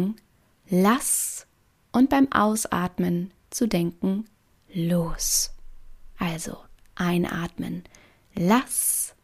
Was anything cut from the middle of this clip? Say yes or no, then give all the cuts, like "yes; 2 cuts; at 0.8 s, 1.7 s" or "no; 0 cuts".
no; 0 cuts